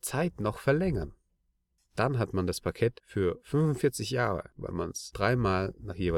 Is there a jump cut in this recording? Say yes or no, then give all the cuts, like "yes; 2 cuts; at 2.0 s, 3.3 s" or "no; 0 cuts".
no; 0 cuts